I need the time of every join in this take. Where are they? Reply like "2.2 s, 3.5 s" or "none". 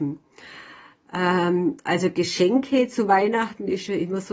none